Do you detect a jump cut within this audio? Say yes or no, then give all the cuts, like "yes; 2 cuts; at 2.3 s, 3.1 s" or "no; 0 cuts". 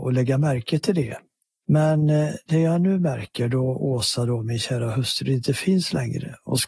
no; 0 cuts